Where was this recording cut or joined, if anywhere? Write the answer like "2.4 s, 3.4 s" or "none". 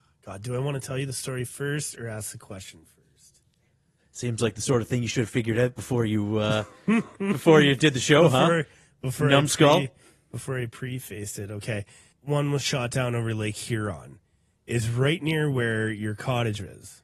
12.1 s